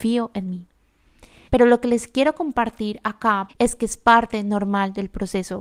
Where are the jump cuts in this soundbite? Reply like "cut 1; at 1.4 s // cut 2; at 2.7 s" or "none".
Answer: cut 1; at 1.5 s // cut 2; at 3.5 s